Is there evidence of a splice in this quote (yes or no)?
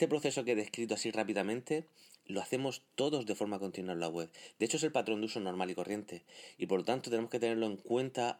no